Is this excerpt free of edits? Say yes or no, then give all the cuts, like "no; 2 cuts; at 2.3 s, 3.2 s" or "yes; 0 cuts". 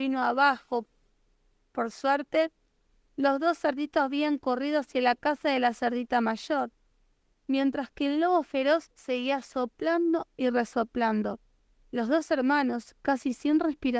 yes; 0 cuts